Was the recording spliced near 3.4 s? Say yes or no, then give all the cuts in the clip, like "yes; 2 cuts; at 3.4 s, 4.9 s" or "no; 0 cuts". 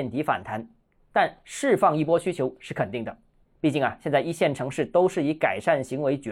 yes; 1 cut; at 3.4 s